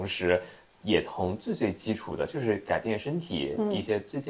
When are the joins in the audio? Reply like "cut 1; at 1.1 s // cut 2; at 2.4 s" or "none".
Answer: none